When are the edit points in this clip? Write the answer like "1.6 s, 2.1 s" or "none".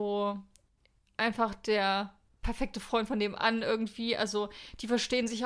2.3 s